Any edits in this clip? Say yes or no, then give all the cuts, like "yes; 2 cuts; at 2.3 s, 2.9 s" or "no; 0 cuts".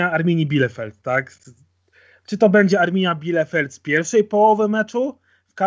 no; 0 cuts